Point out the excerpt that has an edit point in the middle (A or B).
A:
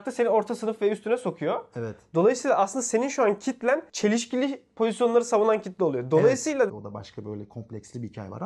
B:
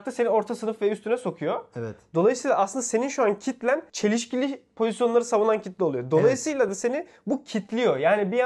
A